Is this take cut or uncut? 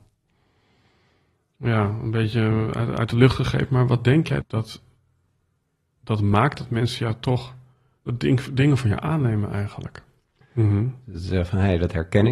cut